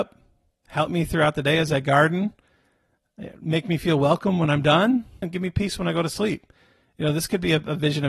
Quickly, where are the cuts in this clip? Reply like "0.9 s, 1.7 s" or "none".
5.2 s

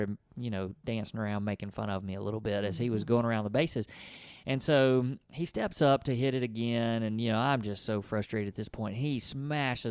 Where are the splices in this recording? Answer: none

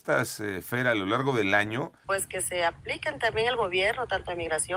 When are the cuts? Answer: 2.0 s

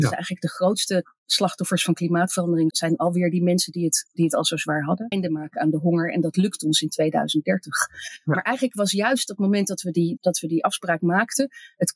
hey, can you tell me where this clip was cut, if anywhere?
2.7 s, 5.1 s, 10.2 s

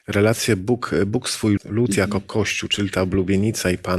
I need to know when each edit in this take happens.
1.6 s

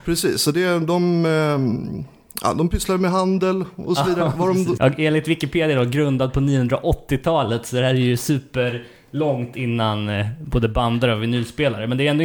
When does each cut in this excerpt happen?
4.8 s

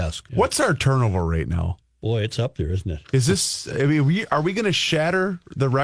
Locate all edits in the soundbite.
none

